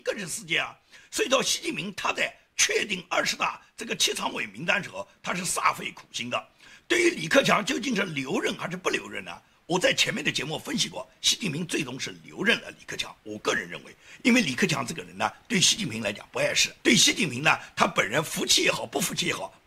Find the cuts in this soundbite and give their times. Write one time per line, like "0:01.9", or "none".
0:16.8

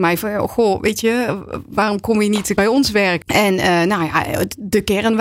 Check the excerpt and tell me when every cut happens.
0:03.2

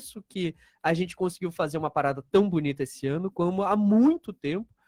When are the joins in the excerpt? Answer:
none

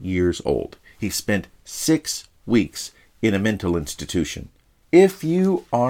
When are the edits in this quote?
0:04.8

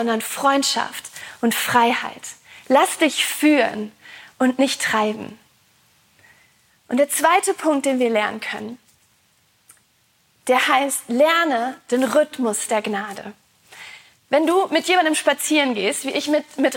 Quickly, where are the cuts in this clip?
none

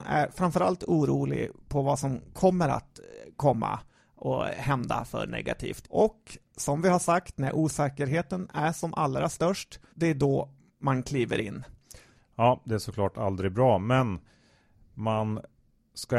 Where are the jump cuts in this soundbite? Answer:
0:05.8
0:09.9
0:12.1

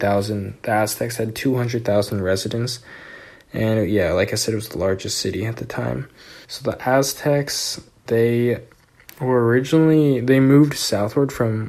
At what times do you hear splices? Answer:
0:06.4
0:08.1

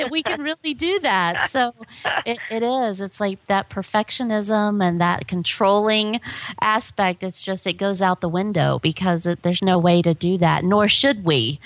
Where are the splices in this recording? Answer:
0:09.6

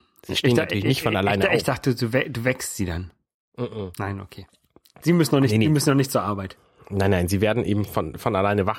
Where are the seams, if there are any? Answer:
none

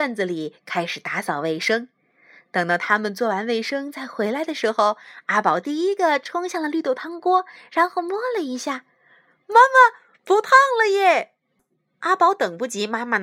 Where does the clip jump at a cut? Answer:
none

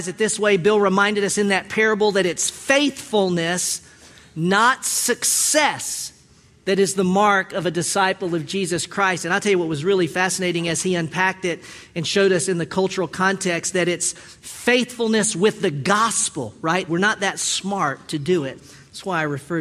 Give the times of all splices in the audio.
0:16.9
0:18.6

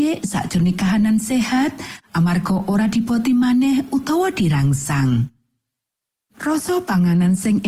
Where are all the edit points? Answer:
0:06.3

